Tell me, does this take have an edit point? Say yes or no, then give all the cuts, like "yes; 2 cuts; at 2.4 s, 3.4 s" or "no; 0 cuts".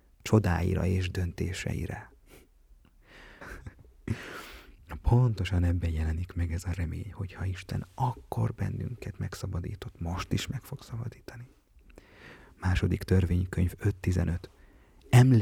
yes; 1 cut; at 3.4 s